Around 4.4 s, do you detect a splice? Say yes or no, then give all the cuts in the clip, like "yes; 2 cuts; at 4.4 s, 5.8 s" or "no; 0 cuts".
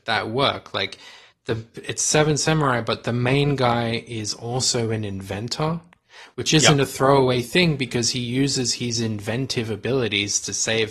no; 0 cuts